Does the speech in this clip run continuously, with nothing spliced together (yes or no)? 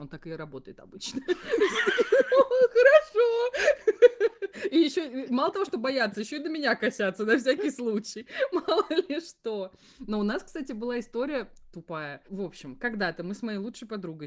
no